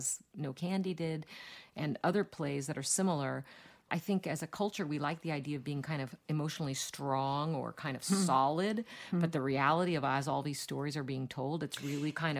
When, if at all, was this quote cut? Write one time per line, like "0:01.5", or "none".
0:03.9

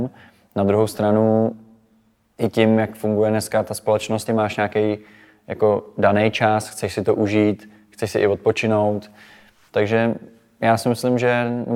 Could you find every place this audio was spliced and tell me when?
0:04.3

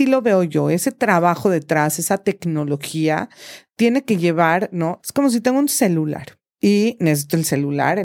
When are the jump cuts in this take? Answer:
0:05.0

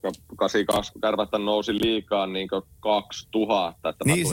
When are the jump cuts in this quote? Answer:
0:00.9

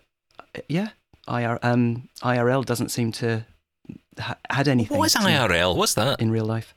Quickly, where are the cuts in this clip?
0:05.7

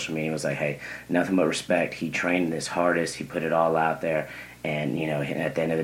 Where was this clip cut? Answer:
none

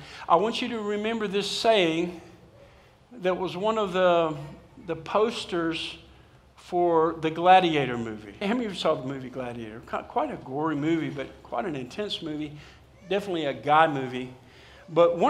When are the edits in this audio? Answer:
0:08.4

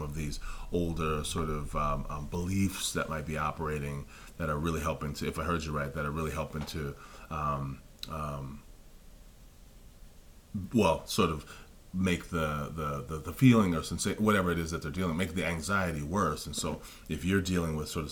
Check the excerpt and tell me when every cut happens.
none

